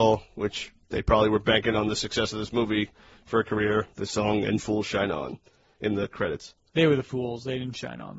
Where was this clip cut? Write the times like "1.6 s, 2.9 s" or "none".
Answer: none